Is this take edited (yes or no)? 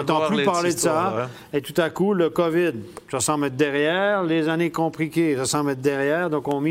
no